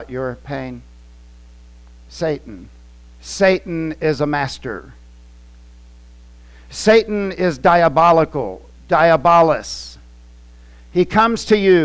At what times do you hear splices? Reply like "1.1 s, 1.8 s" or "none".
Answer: 3.1 s